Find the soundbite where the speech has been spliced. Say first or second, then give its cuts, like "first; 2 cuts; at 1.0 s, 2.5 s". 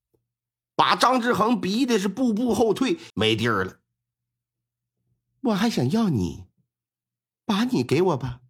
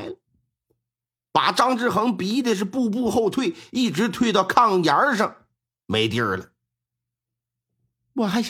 first; 1 cut; at 3.1 s